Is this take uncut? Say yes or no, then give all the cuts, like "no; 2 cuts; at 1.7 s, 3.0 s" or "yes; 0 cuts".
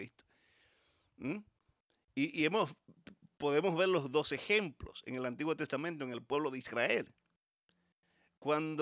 yes; 0 cuts